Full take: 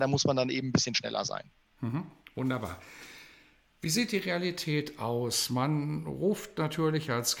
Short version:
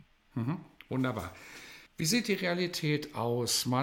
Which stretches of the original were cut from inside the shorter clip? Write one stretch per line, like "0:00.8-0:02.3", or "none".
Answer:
0:03.3-0:03.7

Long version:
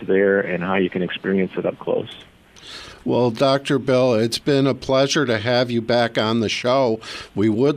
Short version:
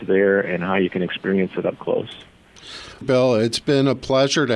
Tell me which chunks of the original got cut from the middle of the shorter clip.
0:03.0-0:03.8

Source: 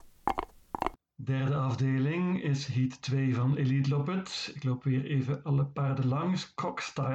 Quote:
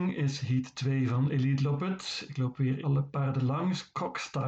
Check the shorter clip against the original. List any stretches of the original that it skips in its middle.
0:05.1-0:05.4

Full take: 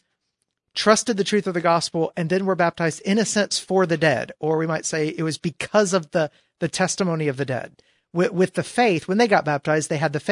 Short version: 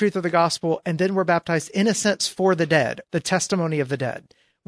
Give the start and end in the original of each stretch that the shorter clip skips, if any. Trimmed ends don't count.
0:04.4-0:06.5

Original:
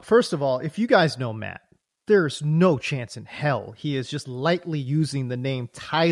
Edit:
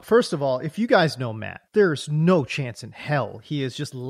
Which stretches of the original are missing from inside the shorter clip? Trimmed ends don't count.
0:01.7-0:02.0

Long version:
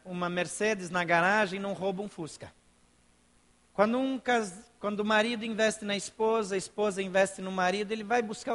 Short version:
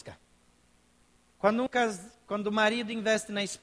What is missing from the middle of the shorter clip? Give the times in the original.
0:04.0-0:04.2

